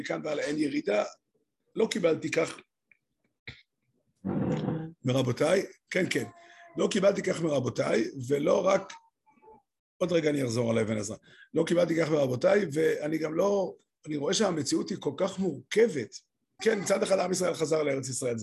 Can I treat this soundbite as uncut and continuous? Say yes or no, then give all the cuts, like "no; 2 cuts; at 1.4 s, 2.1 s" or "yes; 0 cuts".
no; 1 cut; at 16.6 s